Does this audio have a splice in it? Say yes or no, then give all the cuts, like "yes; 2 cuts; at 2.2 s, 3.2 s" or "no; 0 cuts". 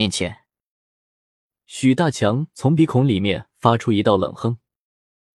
no; 0 cuts